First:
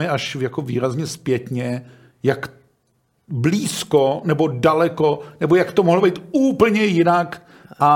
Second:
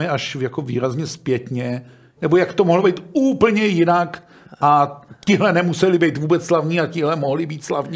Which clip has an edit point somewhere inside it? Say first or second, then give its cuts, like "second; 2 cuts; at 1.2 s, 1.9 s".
second; 1 cut; at 2.2 s